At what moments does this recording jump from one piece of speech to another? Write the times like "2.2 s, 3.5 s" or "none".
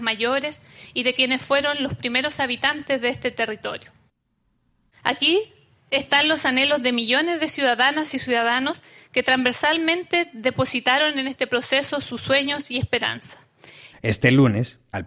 4.9 s, 13.9 s